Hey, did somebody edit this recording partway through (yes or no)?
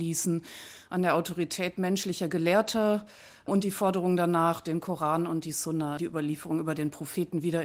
yes